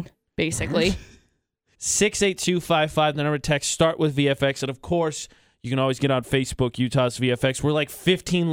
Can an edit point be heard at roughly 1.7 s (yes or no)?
yes